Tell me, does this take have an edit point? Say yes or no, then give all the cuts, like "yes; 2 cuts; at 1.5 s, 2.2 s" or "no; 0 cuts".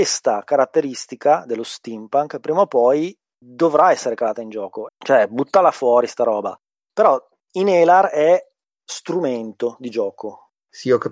yes; 1 cut; at 4.9 s